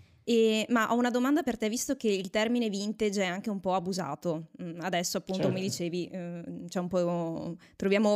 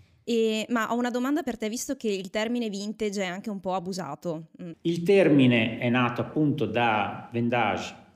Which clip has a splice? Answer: second; 1 cut; at 4.7 s

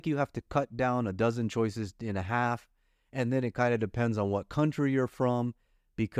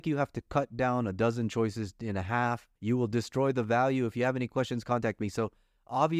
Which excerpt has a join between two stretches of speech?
second; 1 cut; at 2.8 s

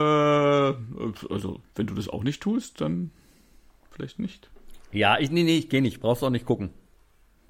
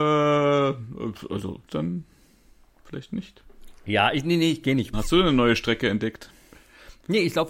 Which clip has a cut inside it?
second; 2 cuts; at 1.7 s, 4.9 s

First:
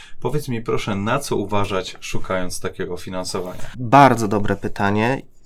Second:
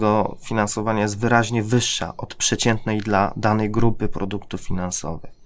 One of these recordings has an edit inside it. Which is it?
first; 1 cut; at 3.7 s

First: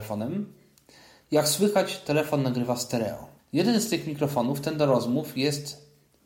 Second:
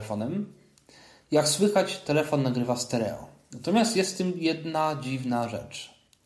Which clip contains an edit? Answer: first; 1 cut; at 3.4 s

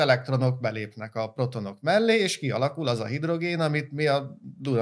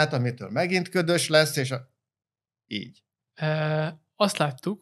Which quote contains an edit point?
second; 1 cut; at 3.2 s

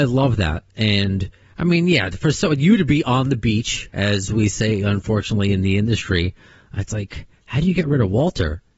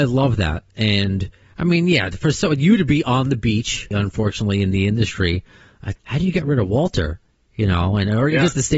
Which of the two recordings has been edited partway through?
second; 2 cuts; at 3.9 s, 6.0 s

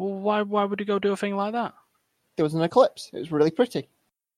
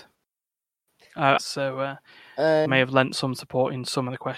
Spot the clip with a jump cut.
second; 2 cuts; at 1.4 s, 2.7 s

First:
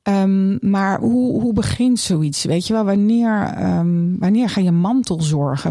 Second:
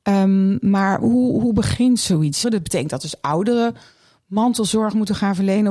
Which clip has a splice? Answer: second; 1 cut; at 2.4 s

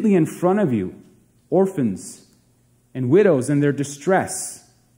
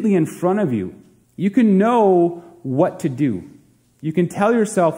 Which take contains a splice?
second; 1 cut; at 1.2 s

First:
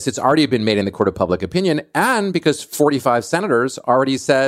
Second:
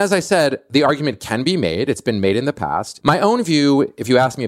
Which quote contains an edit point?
second; 1 cut; at 3.0 s

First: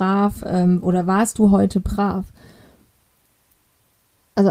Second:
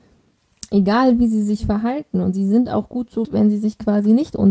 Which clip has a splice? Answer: second; 1 cut; at 3.2 s

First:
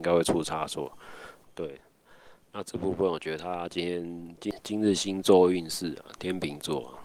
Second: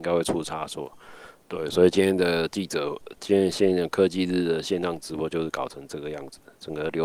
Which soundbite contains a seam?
first; 1 cut; at 1.4 s

